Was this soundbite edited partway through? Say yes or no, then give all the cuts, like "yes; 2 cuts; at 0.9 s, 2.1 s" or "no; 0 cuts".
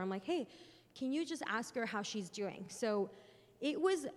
no; 0 cuts